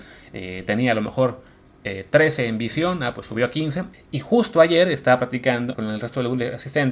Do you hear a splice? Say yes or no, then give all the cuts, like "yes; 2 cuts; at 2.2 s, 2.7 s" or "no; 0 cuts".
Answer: yes; 2 cuts; at 3.9 s, 5.7 s